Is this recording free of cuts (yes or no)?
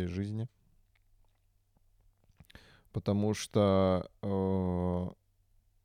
yes